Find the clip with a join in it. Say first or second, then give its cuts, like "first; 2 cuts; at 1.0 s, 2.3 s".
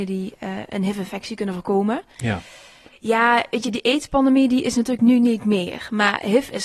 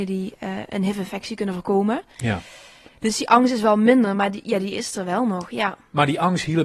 first; 1 cut; at 2.9 s